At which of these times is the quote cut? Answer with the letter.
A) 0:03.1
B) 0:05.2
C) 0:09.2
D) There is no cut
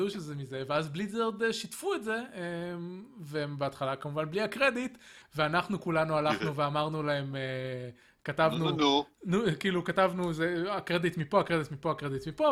B